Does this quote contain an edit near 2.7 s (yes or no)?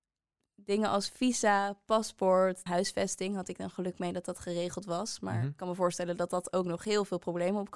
yes